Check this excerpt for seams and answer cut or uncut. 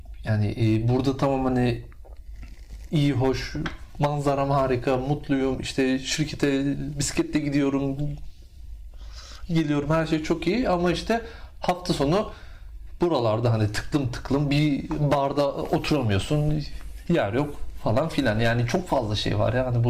uncut